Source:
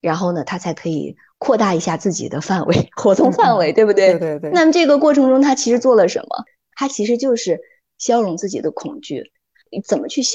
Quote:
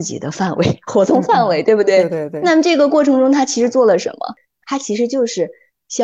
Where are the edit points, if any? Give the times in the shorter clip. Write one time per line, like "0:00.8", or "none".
none